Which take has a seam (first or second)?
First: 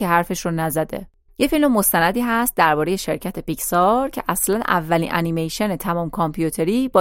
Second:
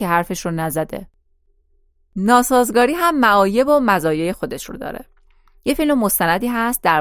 first